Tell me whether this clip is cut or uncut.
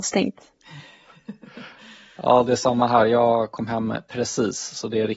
uncut